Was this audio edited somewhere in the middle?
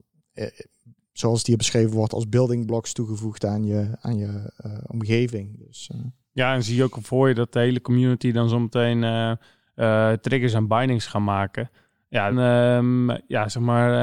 yes; 1 cut; at 12.3 s

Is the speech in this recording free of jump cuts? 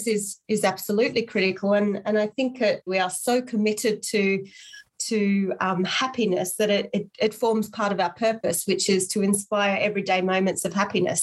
no; 1 cut; at 2.9 s

